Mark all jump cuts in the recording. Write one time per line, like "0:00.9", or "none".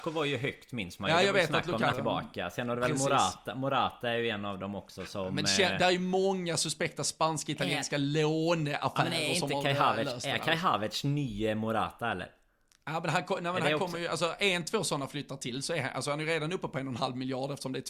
0:01.9